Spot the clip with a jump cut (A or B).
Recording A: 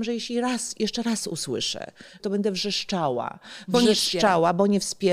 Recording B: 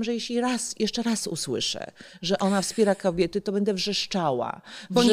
A